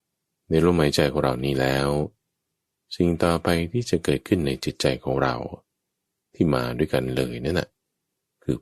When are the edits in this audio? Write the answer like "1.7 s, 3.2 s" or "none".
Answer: none